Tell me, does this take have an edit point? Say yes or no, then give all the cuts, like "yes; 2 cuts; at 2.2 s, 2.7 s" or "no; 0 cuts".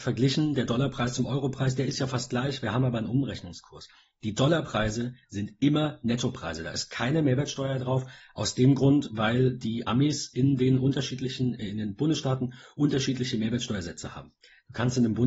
no; 0 cuts